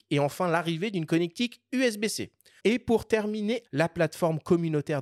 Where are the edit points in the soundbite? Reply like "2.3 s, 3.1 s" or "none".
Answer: 2.6 s, 3.7 s

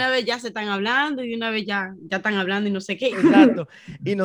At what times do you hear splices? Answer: 3.1 s

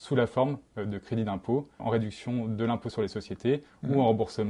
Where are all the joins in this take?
1.8 s

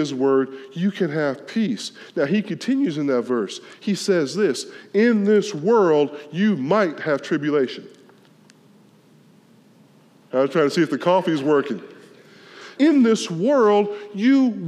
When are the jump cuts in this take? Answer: 10.3 s, 12.8 s

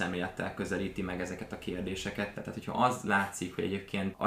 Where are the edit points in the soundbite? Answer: 2.3 s

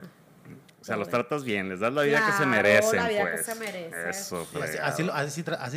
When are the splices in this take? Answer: none

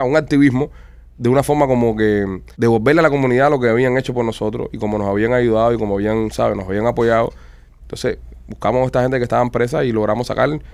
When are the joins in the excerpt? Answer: 2.5 s, 7.8 s

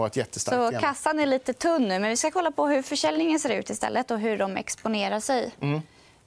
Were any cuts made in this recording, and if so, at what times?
none

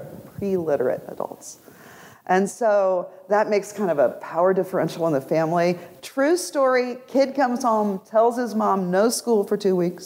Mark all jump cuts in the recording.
none

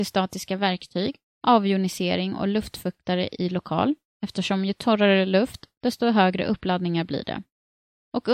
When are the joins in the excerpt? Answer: 1.3 s

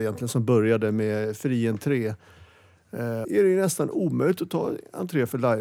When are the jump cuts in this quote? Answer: 3.2 s

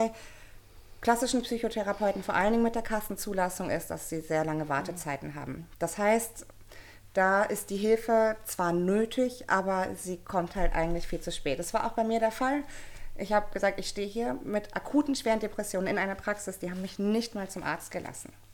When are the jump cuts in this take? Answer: none

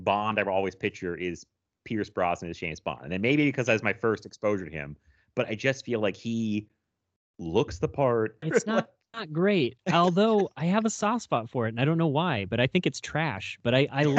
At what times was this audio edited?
8.4 s

